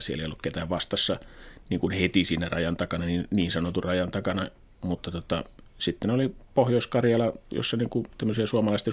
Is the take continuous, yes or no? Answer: yes